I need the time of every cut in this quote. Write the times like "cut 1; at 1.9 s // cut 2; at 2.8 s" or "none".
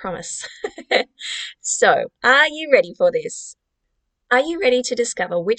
none

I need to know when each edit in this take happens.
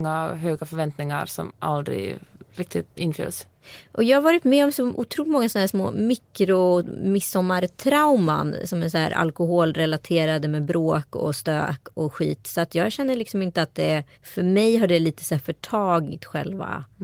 cut 1; at 2.9 s // cut 2; at 14.1 s

